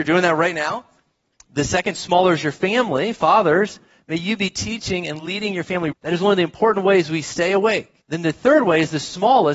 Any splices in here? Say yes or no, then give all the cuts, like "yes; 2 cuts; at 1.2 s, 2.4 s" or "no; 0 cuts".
yes; 2 cuts; at 5.9 s, 8.0 s